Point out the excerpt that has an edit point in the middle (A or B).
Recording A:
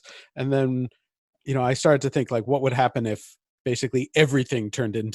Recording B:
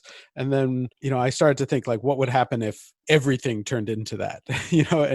B